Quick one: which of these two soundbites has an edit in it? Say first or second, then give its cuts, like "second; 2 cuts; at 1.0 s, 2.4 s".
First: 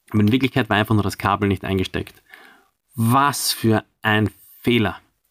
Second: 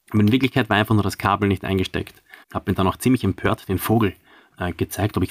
second; 1 cut; at 2.4 s